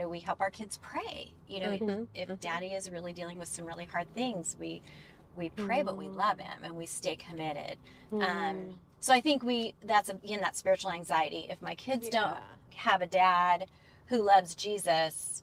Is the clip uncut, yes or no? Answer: yes